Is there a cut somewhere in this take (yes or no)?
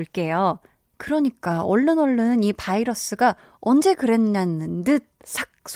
yes